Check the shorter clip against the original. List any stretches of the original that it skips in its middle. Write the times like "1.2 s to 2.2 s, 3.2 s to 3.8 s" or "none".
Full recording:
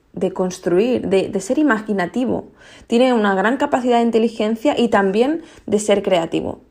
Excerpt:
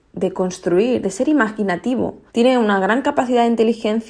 1.0 s to 1.3 s, 2.6 s to 2.8 s